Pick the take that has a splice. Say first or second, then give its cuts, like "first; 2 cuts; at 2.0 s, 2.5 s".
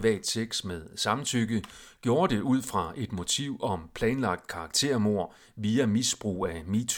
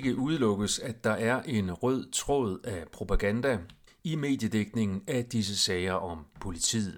second; 1 cut; at 3.9 s